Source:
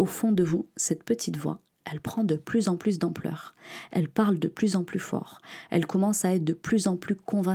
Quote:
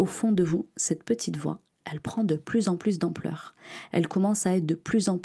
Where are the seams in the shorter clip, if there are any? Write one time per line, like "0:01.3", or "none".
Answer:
0:03.9